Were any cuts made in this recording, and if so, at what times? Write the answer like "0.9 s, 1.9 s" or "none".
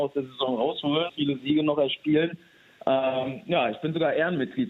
1.1 s